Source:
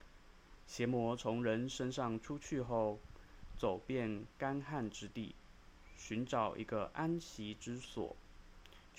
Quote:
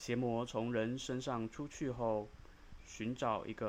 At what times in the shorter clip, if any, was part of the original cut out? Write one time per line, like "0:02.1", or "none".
0:02.8